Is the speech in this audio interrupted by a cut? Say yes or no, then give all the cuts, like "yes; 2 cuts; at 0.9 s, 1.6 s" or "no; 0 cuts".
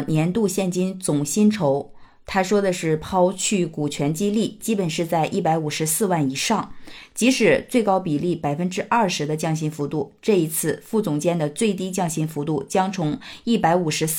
no; 0 cuts